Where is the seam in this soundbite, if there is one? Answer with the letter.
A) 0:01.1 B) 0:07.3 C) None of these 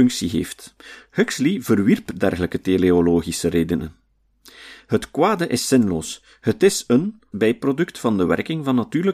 B